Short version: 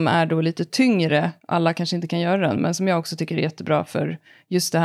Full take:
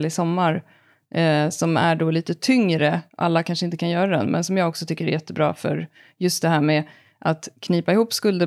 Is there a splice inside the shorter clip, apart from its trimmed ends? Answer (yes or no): no